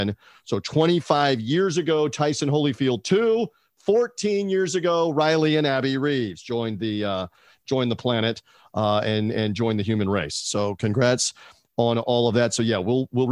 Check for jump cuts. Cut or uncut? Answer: uncut